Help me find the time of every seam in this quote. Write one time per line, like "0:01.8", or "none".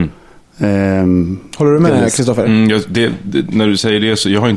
none